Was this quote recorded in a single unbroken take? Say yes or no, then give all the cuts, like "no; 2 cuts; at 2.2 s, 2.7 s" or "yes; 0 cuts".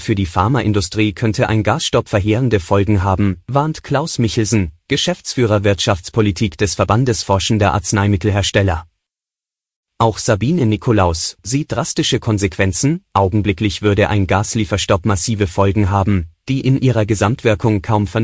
no; 1 cut; at 11.4 s